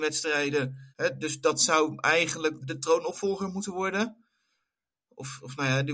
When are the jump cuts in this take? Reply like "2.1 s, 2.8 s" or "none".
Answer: 0.9 s, 2.6 s